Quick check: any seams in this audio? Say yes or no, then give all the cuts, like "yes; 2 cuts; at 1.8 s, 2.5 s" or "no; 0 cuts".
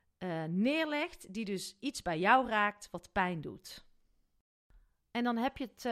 no; 0 cuts